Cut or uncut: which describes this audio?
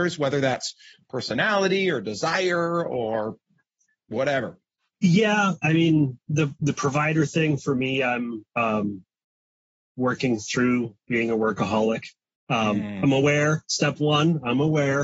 uncut